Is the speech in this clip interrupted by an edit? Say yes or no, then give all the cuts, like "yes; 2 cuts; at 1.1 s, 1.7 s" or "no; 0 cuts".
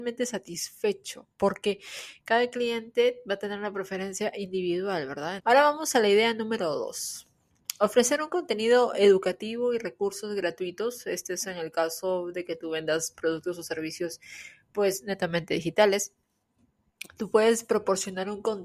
yes; 1 cut; at 5.4 s